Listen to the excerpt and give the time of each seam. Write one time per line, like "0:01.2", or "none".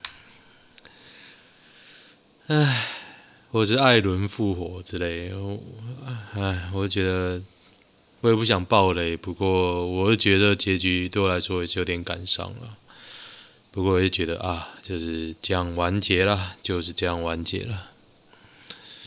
none